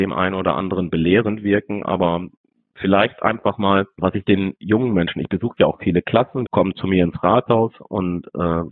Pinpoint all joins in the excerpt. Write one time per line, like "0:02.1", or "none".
0:06.4